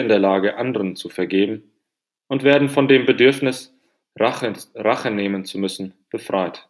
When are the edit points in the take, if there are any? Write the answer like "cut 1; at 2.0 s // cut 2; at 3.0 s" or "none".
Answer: none